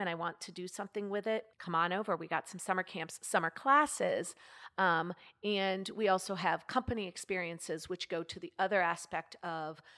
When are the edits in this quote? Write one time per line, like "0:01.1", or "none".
0:01.5